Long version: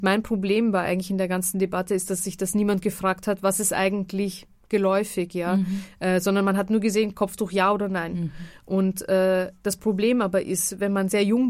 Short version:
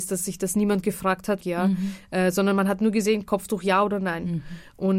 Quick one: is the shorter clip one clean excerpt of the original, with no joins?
no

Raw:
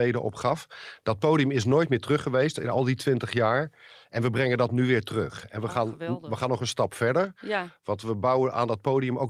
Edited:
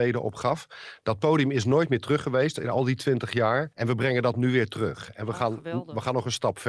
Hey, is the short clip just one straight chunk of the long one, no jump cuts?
no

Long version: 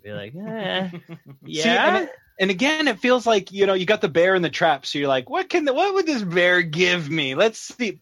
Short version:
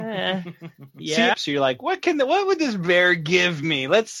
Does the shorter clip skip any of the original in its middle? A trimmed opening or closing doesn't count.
yes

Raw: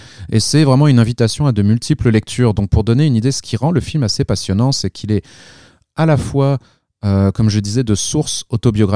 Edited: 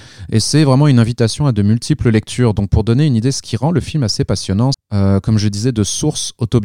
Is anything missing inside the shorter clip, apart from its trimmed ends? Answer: yes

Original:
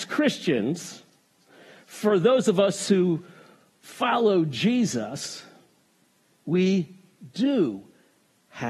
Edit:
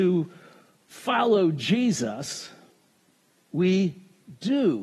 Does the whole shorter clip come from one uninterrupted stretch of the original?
yes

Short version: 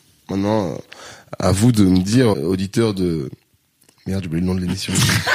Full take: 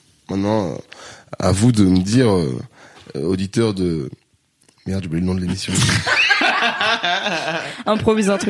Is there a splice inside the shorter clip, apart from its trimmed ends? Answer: yes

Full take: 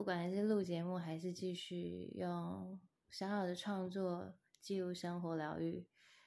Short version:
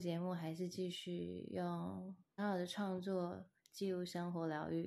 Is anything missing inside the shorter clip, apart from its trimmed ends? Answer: yes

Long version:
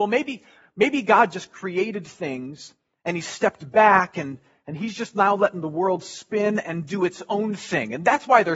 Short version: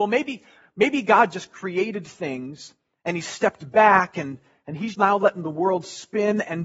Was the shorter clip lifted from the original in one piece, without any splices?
no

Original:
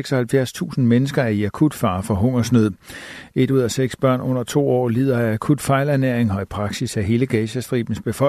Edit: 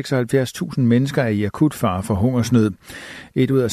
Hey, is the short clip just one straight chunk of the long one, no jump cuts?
yes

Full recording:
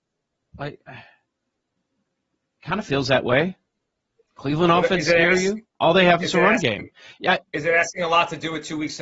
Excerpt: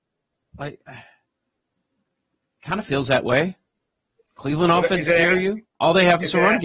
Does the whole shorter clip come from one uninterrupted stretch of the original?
yes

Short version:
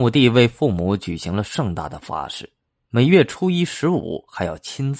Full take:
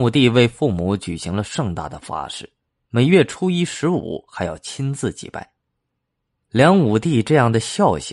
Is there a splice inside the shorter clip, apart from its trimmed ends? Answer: no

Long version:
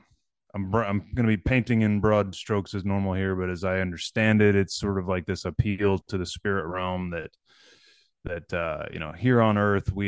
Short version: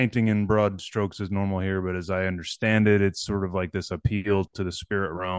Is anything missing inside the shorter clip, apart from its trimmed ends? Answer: no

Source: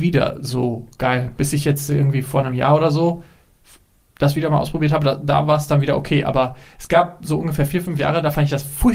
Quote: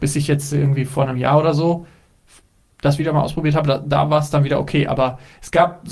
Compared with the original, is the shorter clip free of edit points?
yes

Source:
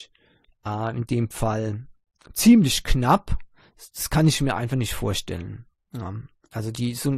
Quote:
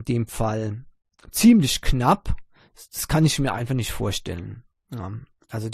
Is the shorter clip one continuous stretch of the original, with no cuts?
yes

